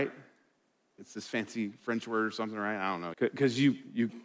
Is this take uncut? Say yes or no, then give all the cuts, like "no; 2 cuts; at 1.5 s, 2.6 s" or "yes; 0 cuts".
no; 2 cuts; at 1.0 s, 3.1 s